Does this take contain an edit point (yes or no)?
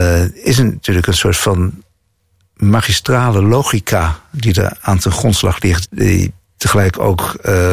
yes